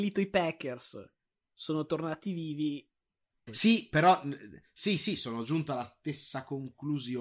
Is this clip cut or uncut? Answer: cut